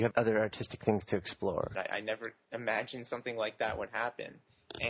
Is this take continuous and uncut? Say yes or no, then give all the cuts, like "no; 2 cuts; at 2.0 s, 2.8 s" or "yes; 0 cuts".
no; 1 cut; at 1.8 s